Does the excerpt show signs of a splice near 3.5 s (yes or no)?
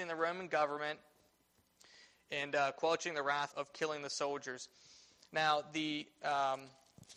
yes